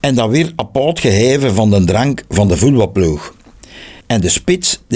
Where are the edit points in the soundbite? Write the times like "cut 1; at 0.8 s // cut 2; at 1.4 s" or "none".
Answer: cut 1; at 4.0 s